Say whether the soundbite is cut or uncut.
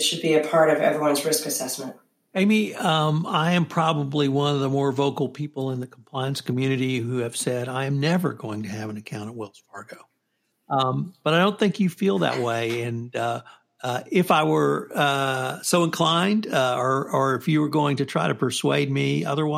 uncut